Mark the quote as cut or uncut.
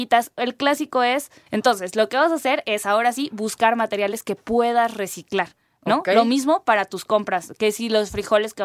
cut